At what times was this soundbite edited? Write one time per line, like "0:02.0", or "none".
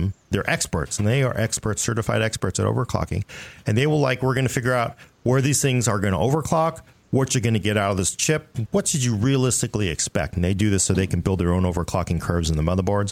none